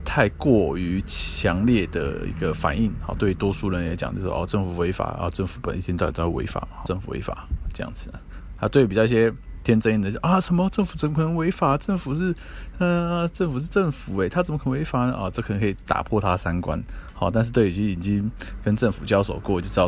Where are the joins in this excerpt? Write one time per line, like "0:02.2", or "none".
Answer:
0:06.8